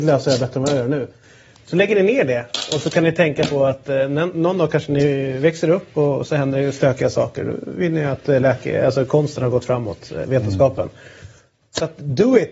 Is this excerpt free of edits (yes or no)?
yes